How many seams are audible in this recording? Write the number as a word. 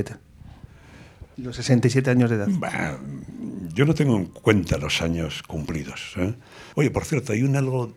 two